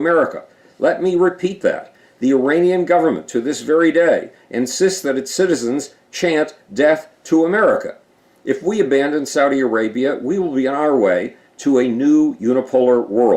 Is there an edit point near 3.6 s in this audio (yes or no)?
no